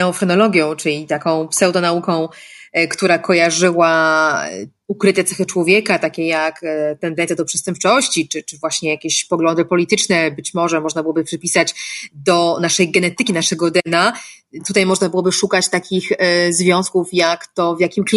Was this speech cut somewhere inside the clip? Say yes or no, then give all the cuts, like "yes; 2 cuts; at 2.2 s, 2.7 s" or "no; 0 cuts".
no; 0 cuts